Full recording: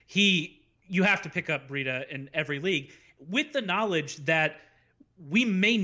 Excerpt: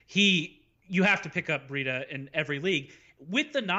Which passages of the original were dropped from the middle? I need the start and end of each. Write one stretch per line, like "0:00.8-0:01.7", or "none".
none